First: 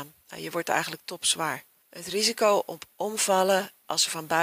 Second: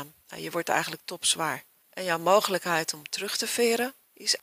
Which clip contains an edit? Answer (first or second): second